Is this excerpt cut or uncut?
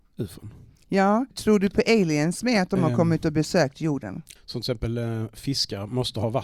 cut